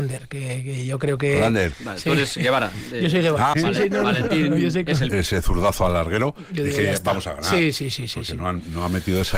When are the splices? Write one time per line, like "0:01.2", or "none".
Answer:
0:03.5
0:05.1